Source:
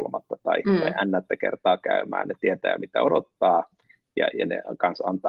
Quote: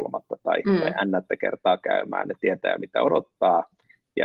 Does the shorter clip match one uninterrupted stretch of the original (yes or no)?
yes